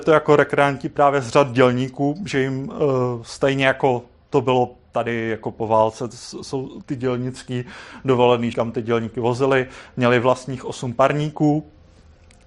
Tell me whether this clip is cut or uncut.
cut